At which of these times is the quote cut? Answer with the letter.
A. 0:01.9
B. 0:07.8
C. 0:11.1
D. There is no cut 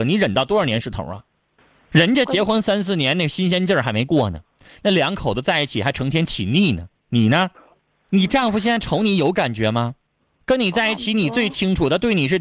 D